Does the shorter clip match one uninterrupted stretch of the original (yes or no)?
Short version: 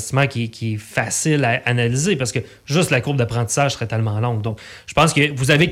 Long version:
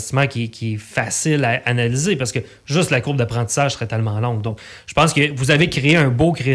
yes